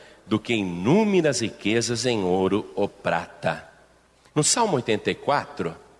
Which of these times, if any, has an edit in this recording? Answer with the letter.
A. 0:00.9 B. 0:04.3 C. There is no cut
B